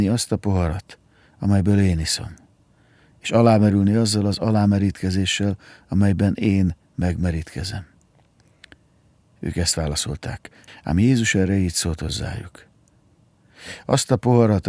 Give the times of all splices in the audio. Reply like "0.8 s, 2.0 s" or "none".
10.7 s